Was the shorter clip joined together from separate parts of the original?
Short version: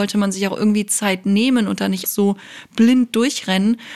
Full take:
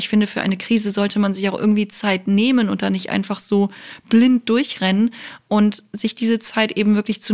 yes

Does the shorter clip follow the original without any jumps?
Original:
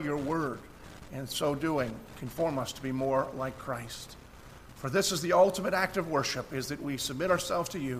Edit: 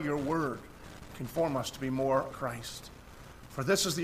no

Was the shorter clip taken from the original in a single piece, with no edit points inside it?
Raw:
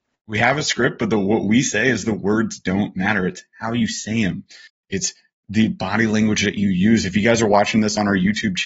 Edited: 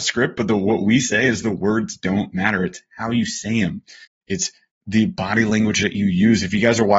yes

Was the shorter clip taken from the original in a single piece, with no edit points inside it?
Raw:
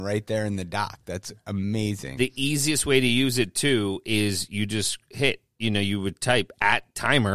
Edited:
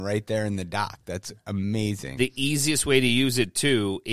yes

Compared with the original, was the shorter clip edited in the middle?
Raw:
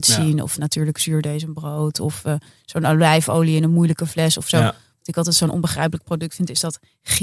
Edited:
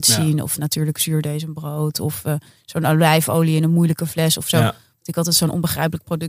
no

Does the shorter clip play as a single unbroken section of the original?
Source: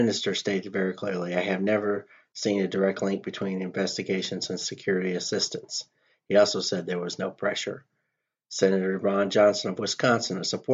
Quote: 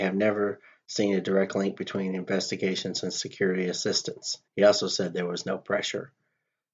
no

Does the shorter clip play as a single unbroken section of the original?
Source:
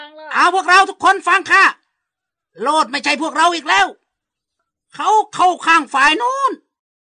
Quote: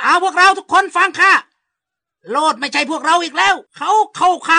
no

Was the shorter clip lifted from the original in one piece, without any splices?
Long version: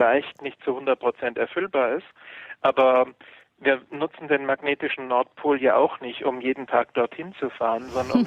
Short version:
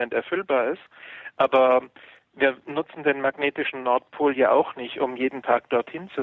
yes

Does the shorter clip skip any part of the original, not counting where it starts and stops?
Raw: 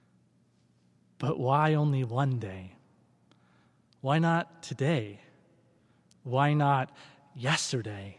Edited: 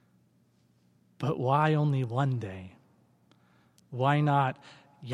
yes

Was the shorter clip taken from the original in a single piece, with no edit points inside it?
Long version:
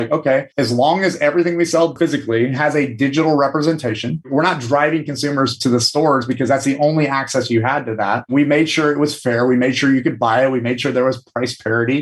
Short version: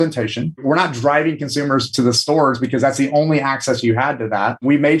yes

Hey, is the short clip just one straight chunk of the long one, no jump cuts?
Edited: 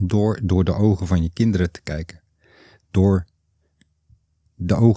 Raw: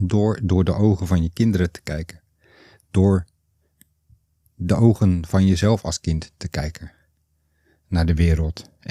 yes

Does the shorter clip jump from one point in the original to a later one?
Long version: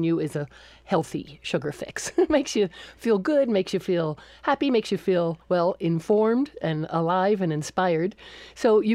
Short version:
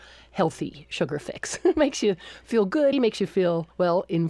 yes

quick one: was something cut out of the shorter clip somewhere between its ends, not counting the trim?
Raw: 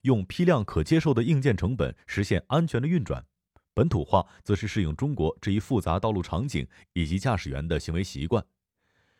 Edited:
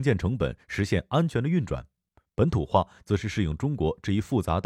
no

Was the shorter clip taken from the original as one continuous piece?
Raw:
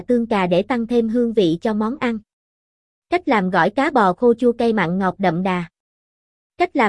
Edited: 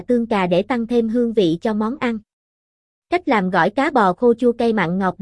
yes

